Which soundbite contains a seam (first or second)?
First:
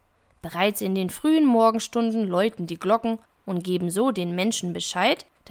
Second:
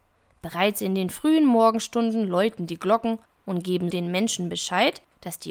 second